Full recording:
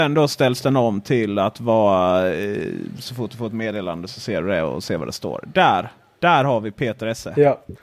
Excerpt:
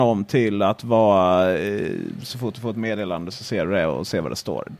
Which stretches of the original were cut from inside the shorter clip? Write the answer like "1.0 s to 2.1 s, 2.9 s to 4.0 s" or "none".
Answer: none